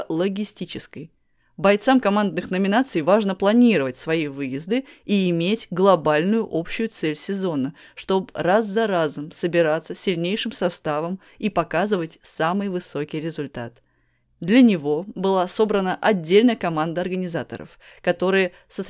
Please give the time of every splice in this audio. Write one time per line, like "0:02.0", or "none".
0:14.2